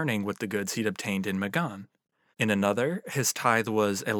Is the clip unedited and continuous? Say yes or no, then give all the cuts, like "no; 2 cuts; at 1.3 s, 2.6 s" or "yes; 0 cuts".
no; 1 cut; at 2.3 s